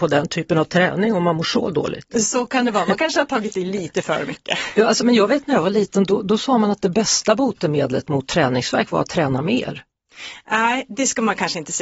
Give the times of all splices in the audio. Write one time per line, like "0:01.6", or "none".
none

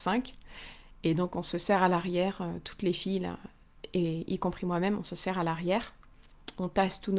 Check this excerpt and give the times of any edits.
none

